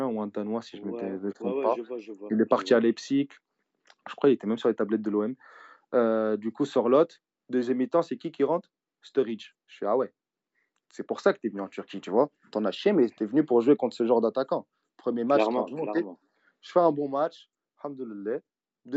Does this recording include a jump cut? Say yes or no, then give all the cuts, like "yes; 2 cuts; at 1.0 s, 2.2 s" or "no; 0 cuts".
no; 0 cuts